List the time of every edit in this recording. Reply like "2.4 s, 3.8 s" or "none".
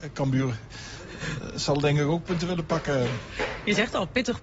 none